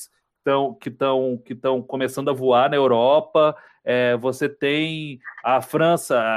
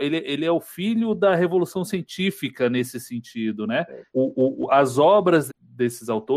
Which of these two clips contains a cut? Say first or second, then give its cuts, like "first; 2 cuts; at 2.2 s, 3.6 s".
second; 2 cuts; at 4.1 s, 5.5 s